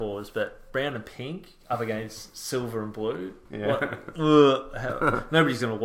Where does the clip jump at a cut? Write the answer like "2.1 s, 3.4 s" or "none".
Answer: none